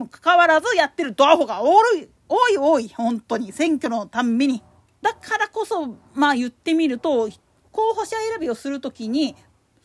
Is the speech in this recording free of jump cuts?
no; 2 cuts; at 5.0 s, 7.7 s

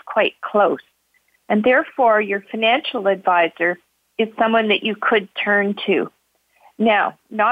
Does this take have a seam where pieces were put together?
no; 0 cuts

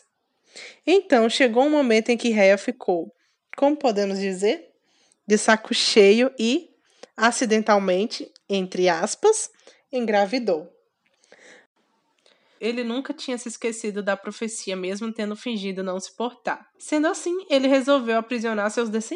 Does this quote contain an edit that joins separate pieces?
yes; 2 cuts; at 12.6 s, 16.7 s

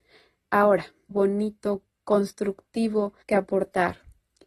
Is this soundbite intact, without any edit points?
no; 2 cuts; at 1.1 s, 3.2 s

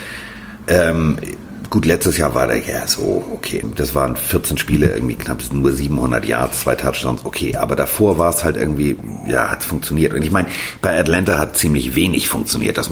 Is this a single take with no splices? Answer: no; 1 cut; at 3.6 s

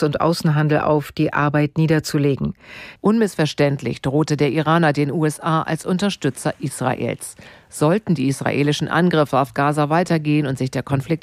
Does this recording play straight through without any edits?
no; 1 cut; at 3.0 s

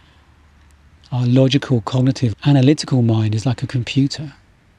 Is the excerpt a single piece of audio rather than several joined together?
no; 1 cut; at 2.3 s

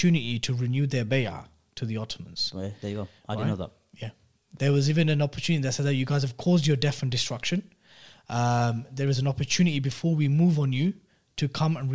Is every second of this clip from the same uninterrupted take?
yes; 0 cuts

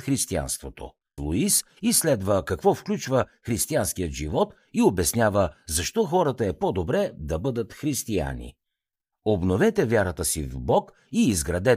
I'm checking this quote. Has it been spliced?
yes; 1 cut; at 1.2 s

